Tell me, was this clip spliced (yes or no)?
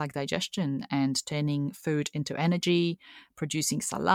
no